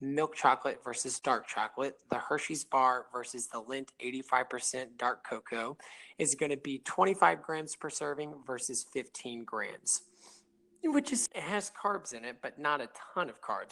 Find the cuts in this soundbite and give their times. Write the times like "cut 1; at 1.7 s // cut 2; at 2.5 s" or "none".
cut 1; at 11.3 s